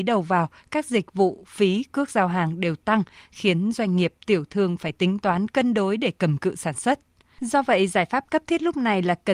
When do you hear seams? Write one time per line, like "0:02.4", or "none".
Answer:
0:07.4